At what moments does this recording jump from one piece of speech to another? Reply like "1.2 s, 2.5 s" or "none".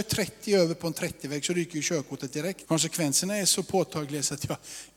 2.6 s